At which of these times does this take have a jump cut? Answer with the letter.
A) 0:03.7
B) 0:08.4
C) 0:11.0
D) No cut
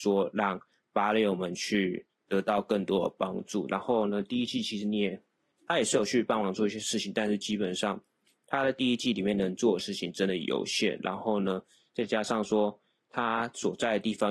A